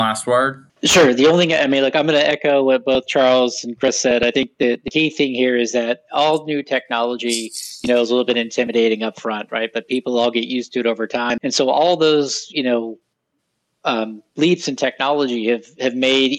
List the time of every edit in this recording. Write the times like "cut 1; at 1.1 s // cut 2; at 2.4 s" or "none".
cut 1; at 11.4 s